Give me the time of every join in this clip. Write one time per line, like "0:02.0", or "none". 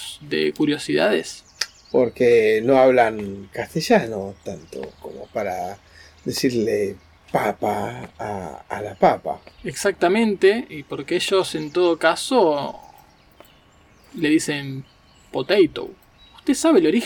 0:01.9